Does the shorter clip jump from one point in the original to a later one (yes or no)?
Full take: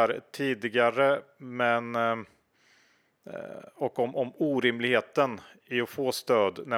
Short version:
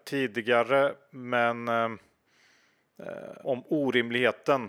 yes